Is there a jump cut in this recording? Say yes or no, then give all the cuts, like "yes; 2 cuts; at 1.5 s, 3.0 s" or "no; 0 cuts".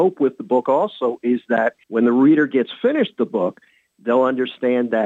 yes; 1 cut; at 1.8 s